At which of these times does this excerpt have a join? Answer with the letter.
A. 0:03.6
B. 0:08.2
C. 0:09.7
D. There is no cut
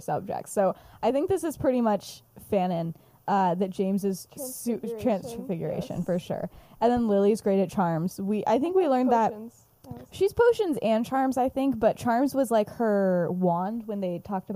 C